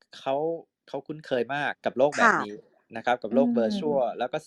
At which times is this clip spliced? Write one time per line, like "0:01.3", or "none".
0:01.7